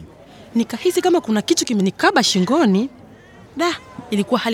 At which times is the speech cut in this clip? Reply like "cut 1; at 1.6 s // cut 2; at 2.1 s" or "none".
cut 1; at 3.5 s